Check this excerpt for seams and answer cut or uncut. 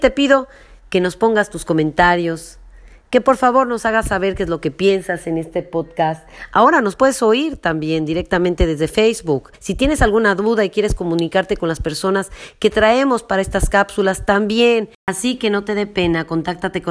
uncut